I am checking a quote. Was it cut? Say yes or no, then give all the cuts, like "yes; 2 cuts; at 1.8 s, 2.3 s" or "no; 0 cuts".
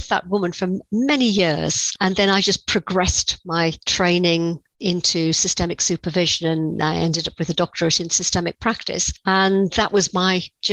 yes; 1 cut; at 3.8 s